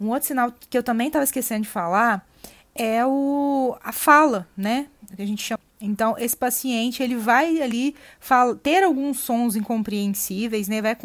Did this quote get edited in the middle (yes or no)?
no